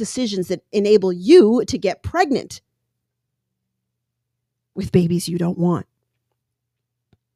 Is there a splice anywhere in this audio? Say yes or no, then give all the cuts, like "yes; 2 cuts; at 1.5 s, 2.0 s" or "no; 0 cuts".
no; 0 cuts